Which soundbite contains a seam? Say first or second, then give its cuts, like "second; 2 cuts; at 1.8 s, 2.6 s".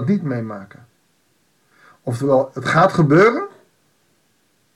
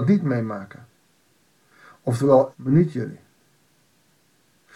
second; 1 cut; at 2.5 s